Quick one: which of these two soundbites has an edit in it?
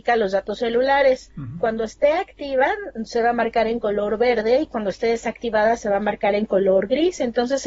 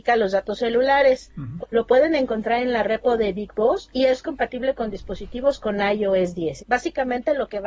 second; 2 cuts; at 1.6 s, 6.6 s

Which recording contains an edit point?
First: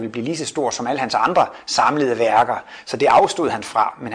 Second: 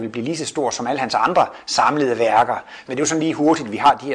second; 1 cut; at 2.8 s

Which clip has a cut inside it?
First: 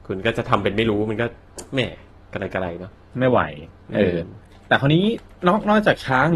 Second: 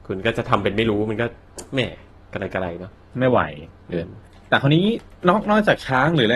second; 1 cut; at 3.9 s

